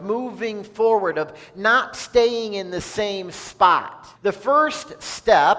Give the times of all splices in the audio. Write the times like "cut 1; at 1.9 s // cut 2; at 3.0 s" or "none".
cut 1; at 4.2 s